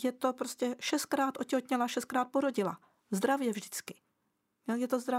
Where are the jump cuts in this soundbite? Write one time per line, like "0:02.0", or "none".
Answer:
none